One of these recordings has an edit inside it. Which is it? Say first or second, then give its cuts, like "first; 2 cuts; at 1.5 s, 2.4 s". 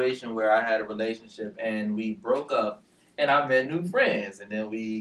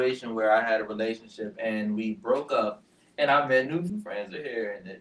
second; 1 cut; at 3.9 s